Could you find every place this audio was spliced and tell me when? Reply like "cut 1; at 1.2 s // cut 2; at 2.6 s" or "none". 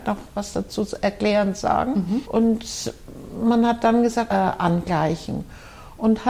cut 1; at 2.2 s // cut 2; at 4.3 s